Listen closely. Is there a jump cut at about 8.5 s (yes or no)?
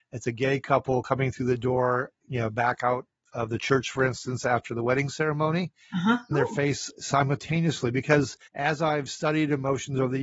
yes